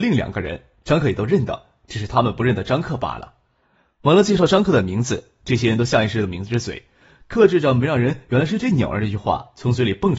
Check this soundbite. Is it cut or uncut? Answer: uncut